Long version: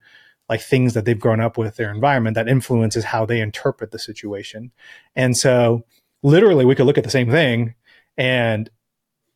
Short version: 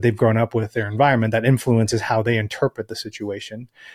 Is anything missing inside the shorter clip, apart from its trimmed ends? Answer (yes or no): no